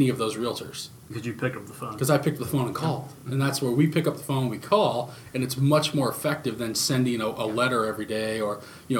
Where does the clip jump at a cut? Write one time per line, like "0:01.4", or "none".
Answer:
none